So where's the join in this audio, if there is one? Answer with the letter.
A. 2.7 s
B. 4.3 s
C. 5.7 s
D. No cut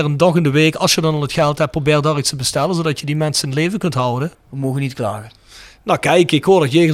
B